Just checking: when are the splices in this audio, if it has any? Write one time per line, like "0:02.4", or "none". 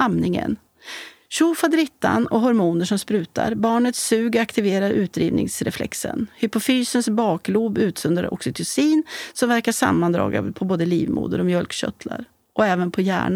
none